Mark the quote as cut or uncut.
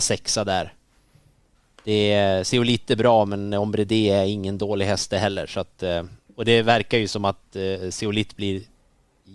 uncut